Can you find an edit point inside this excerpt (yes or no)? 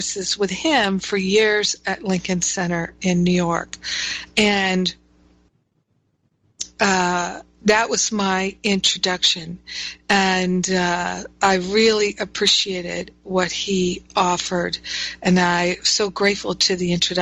no